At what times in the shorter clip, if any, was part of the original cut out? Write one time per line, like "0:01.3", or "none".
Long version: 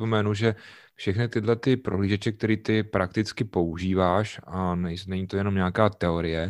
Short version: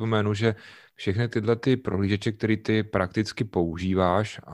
none